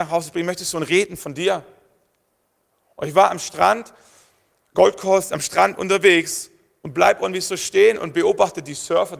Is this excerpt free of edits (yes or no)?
yes